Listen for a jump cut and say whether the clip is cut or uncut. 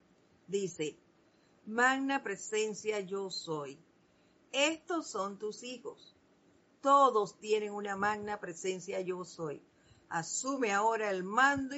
uncut